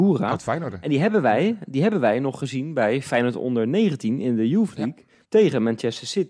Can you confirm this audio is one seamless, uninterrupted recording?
no; 1 cut; at 5.2 s

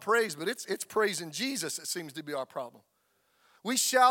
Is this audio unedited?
yes; 0 cuts

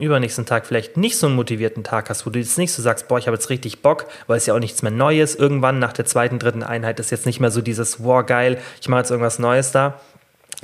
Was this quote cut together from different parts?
no; 0 cuts

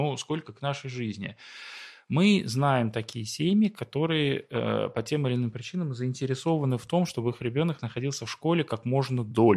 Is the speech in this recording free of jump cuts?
yes; 0 cuts

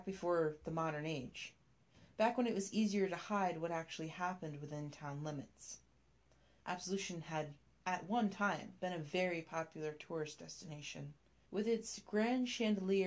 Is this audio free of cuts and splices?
no; 2 cuts; at 6.6 s, 11.5 s

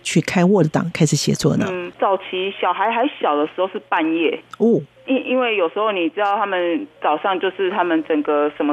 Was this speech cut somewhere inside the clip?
no; 0 cuts

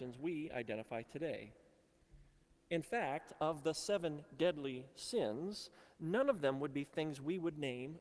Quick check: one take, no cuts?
yes; 0 cuts

